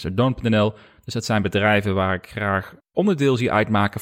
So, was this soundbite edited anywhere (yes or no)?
no